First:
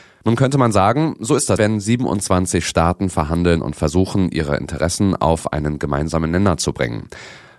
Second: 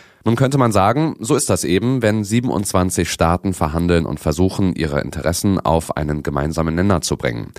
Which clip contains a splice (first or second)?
first